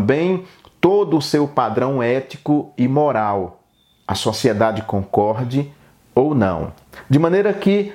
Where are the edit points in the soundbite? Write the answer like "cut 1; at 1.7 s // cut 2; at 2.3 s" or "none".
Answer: none